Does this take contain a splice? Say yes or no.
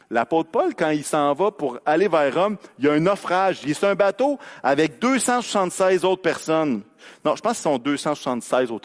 no